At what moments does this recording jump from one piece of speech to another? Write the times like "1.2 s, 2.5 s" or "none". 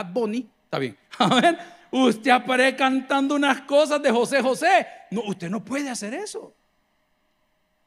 none